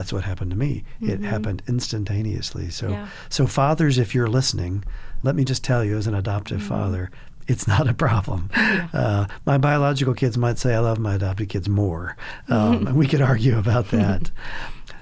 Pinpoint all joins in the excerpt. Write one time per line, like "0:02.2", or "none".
0:05.2